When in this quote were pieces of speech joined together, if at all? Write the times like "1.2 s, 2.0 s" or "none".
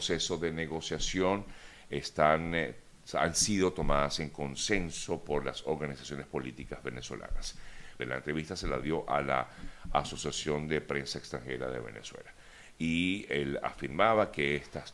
8.0 s